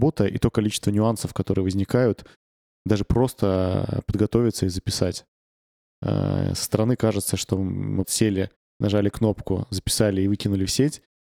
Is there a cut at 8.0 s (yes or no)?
yes